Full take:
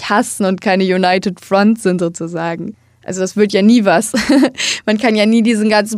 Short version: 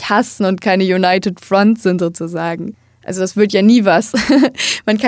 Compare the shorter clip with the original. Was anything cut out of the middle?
no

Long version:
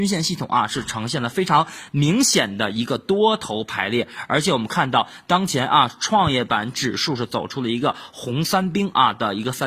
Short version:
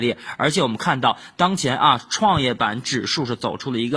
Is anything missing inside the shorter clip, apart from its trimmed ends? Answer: no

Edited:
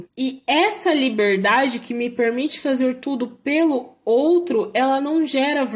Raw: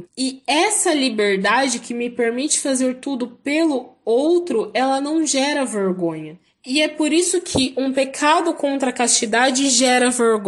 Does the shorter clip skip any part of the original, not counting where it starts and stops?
no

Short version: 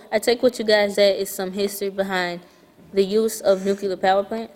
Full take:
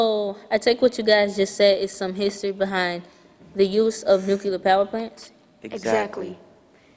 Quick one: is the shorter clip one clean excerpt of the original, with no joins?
no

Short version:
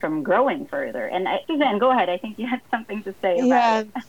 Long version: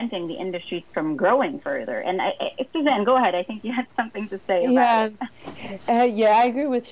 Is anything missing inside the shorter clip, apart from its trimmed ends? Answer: yes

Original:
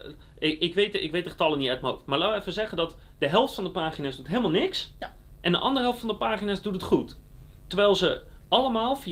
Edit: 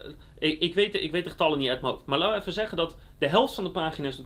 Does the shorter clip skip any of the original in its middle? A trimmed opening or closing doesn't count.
no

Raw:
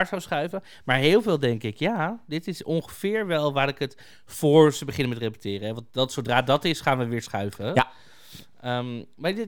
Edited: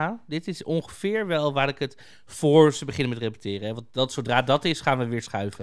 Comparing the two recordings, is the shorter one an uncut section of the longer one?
yes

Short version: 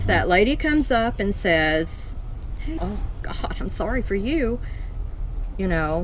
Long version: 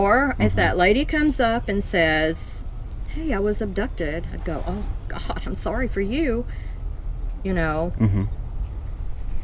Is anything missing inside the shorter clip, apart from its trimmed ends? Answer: yes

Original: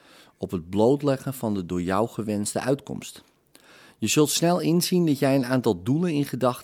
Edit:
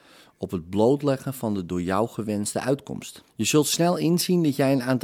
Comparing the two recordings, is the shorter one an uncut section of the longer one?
no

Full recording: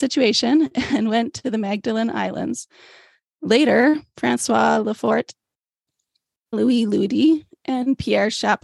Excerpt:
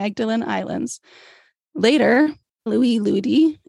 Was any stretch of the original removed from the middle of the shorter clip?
yes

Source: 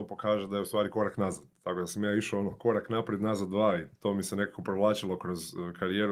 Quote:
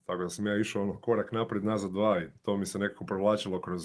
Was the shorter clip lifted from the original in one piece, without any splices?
yes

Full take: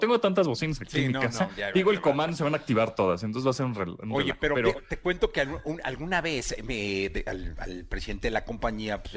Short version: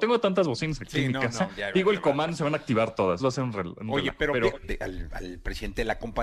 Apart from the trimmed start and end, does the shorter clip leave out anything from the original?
yes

